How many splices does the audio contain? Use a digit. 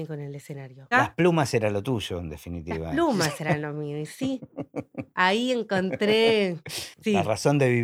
1